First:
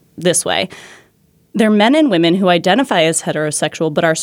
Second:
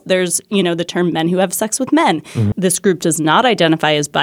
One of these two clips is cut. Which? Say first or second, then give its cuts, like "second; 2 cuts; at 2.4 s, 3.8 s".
second; 1 cut; at 2.5 s